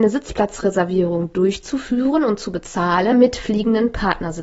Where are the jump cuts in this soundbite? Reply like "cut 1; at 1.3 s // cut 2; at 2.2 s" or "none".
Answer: cut 1; at 3.1 s